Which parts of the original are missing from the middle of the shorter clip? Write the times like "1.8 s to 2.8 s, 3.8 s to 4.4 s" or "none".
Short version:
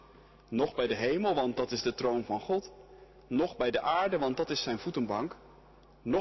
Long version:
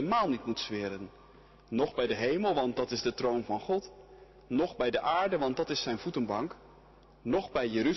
none